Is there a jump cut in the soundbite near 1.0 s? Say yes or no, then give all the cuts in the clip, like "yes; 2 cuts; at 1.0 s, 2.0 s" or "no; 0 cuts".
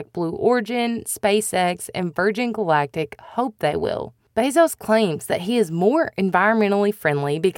no; 0 cuts